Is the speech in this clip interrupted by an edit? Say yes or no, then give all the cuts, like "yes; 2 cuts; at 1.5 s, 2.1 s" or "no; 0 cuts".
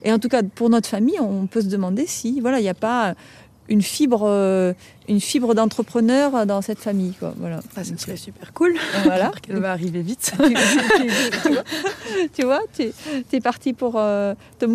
no; 0 cuts